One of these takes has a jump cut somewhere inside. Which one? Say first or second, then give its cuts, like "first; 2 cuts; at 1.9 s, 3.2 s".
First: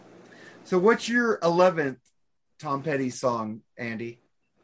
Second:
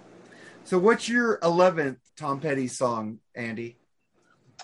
second; 1 cut; at 2.1 s